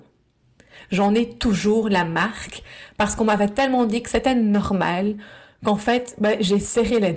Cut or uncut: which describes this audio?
uncut